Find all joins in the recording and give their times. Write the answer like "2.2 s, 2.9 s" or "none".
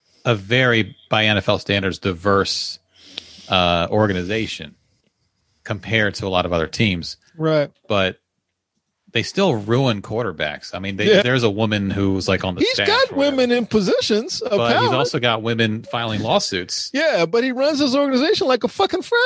11.2 s